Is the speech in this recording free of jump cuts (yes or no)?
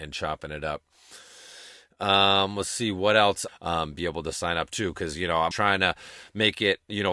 no